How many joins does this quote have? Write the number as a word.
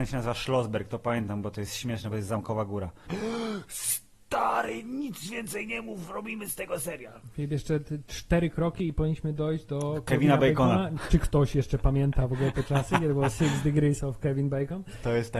one